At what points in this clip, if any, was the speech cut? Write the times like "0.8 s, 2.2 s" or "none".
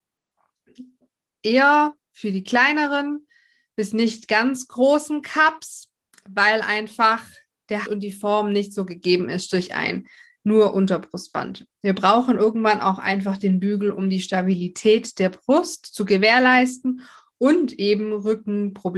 7.9 s